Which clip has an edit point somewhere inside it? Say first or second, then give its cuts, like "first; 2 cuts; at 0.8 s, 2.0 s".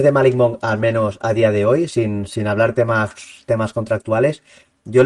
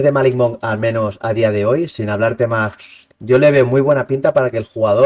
second; 2 cuts; at 1.9 s, 3.1 s